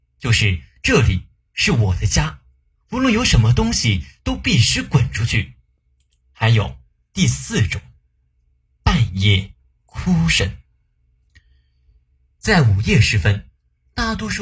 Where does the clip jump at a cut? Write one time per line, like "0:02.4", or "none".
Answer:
none